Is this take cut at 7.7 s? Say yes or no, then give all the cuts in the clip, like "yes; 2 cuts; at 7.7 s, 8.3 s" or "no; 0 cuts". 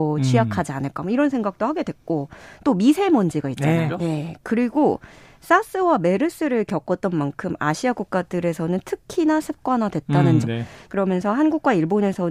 no; 2 cuts; at 3.9 s, 10.4 s